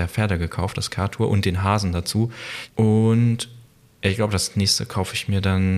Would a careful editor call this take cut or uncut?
cut